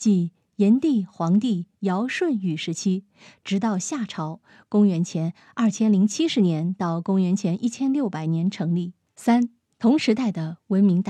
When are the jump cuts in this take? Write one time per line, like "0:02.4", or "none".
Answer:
0:09.1